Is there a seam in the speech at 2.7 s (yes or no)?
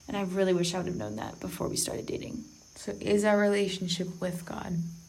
no